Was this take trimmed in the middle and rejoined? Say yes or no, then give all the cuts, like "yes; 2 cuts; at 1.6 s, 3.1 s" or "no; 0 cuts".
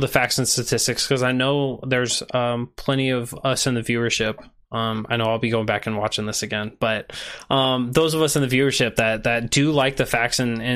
no; 0 cuts